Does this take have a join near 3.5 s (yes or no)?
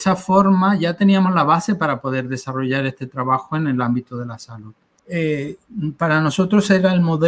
no